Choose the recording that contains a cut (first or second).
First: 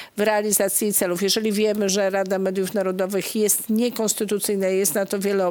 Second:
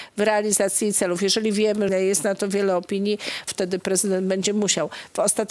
second